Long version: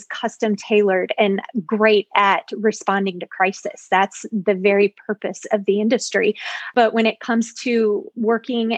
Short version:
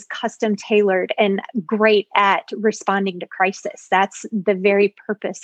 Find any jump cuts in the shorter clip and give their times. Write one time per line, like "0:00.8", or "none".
none